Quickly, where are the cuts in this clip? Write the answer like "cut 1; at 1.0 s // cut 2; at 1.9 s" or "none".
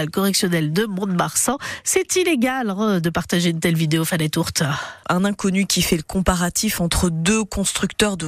cut 1; at 5.0 s